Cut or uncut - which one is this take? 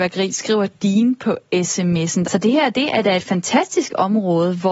cut